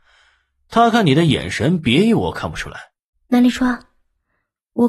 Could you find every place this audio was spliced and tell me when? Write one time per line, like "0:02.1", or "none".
0:03.1